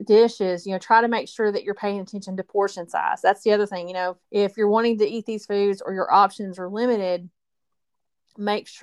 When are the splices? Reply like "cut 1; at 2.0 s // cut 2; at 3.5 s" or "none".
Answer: cut 1; at 4.2 s